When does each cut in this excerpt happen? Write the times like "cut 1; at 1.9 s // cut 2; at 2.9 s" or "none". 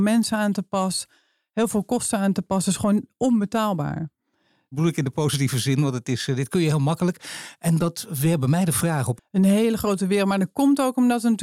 cut 1; at 4.7 s // cut 2; at 9.2 s